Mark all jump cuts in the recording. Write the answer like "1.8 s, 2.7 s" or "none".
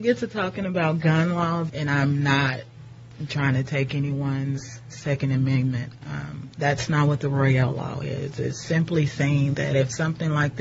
1.7 s, 6.0 s, 8.6 s